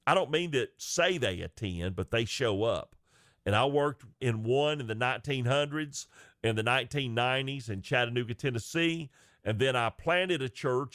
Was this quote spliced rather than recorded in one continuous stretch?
yes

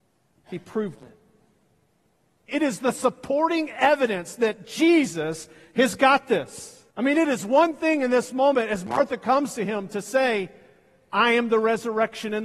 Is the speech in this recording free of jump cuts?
no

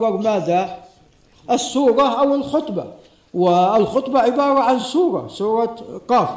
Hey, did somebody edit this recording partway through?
no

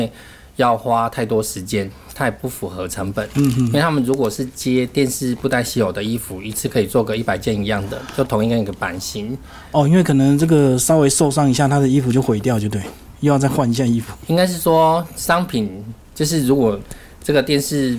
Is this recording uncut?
yes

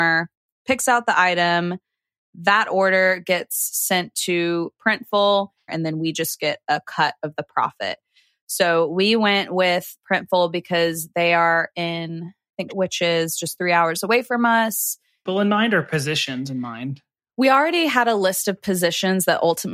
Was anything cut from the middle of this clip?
yes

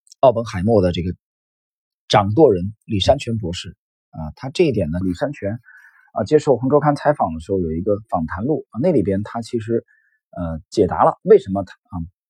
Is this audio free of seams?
no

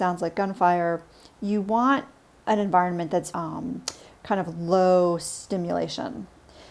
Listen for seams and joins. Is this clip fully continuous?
no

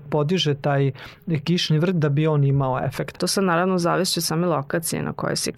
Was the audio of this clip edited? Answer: yes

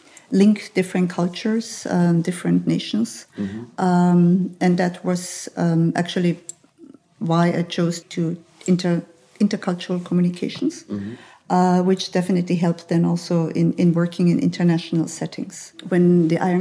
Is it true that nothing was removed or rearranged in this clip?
no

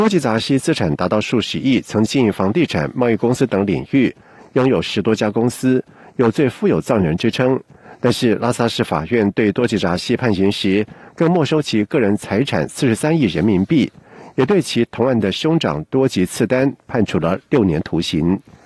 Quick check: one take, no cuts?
no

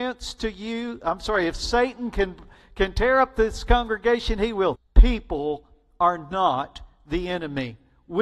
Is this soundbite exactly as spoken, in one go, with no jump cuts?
no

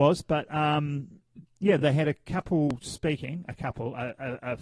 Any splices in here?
no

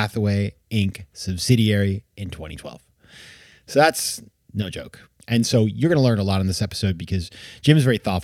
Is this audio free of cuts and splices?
yes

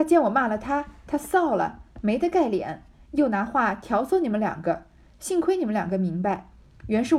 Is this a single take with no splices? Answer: yes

